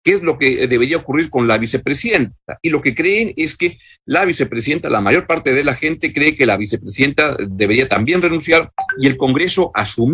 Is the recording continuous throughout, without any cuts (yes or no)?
yes